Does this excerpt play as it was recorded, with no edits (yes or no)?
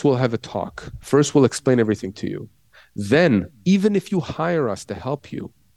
yes